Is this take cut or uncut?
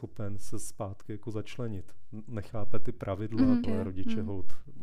cut